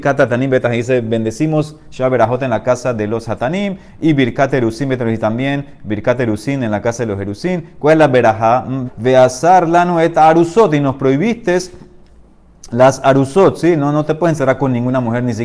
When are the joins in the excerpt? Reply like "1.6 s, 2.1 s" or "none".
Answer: 8.9 s